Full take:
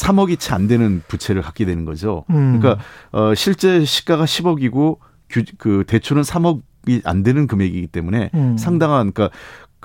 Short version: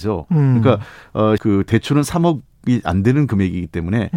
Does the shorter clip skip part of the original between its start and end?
yes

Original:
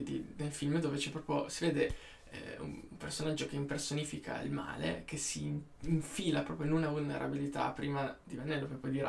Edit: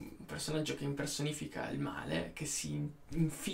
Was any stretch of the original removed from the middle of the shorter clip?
no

